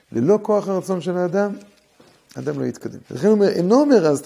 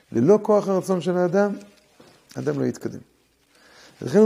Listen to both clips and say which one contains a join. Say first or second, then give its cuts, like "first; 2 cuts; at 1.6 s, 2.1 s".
first; 1 cut; at 3.0 s